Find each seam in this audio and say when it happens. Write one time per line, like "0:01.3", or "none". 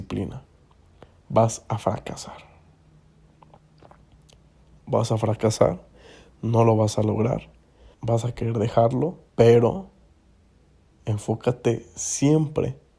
0:07.9
0:09.3